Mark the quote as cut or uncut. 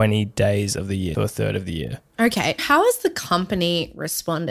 cut